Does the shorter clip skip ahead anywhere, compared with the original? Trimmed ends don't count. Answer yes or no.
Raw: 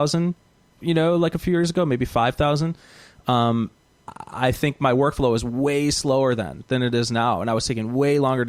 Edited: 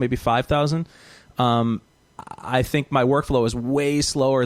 no